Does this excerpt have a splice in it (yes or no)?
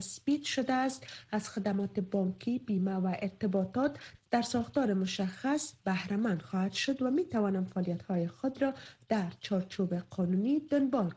no